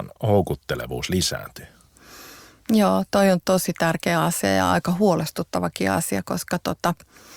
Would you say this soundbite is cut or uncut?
uncut